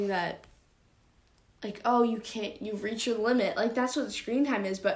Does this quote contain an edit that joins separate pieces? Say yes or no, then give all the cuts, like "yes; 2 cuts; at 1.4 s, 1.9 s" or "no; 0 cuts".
no; 0 cuts